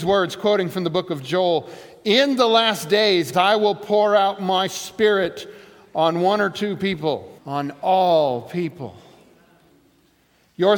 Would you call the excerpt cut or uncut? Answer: cut